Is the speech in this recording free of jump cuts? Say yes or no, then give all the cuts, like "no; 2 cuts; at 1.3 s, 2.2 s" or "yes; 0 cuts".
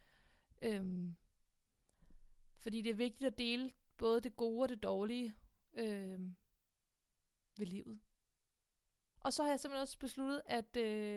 no; 1 cut; at 9.2 s